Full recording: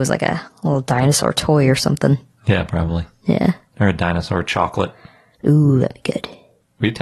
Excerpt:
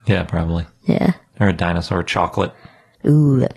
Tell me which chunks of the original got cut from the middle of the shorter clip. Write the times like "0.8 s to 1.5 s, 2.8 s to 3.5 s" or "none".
none